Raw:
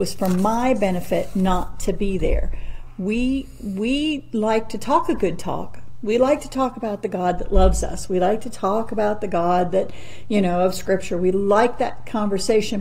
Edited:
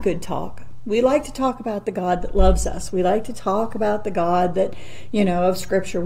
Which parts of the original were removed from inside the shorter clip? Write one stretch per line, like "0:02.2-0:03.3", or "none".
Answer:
none

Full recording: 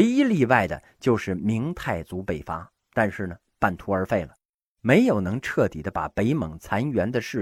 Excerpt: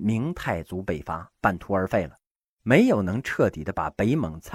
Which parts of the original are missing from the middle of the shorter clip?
0:02.7-0:03.5

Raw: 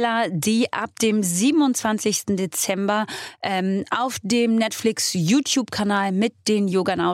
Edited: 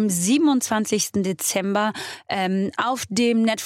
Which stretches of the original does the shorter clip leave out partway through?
none

